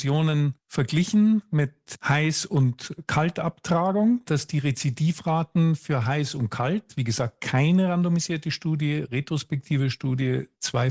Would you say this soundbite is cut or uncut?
cut